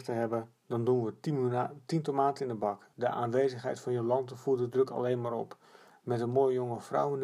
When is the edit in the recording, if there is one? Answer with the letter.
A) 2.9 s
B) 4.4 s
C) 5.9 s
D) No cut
A